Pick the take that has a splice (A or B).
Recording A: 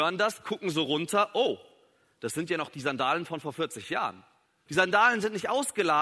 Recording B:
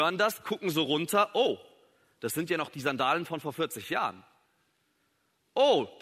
A